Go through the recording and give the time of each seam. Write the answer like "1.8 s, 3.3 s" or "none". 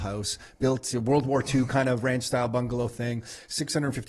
none